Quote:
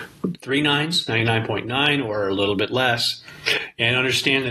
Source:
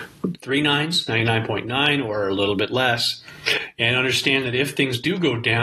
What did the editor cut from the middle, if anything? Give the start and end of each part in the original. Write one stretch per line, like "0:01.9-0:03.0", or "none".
none